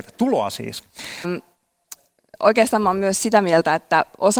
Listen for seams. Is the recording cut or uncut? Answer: cut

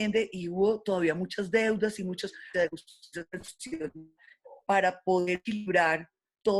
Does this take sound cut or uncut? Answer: cut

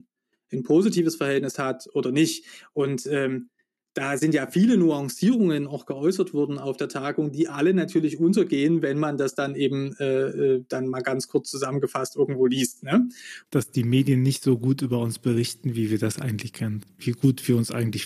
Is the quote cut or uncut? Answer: cut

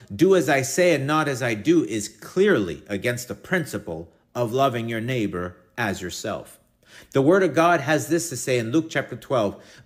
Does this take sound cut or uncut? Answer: uncut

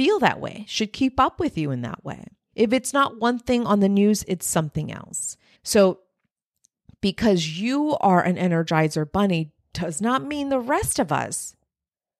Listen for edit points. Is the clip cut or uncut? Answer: cut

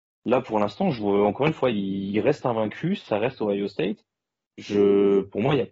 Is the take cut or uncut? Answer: uncut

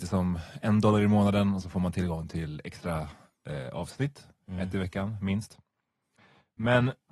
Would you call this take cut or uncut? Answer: uncut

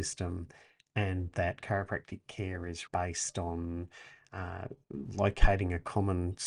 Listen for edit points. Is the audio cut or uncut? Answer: cut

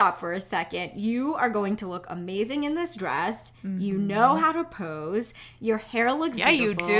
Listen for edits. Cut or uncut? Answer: uncut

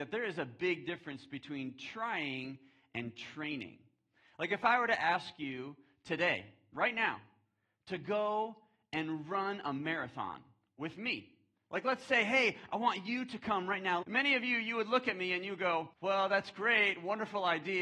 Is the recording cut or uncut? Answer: cut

